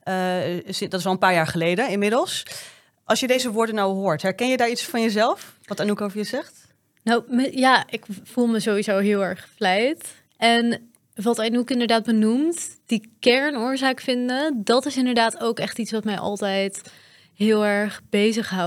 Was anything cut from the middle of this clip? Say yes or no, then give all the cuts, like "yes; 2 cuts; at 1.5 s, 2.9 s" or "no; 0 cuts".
yes; 1 cut; at 4.9 s